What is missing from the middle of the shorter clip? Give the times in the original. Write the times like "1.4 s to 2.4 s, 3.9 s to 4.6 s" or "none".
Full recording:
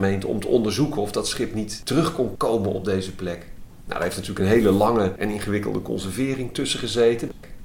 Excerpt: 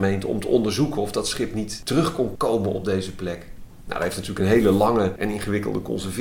none